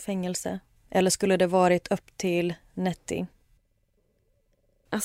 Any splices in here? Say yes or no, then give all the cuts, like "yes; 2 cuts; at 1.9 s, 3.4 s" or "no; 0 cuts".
no; 0 cuts